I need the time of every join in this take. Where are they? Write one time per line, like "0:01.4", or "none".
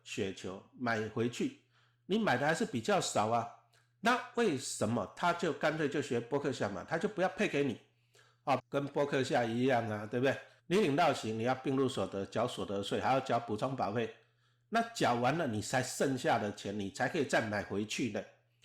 0:08.6
0:10.6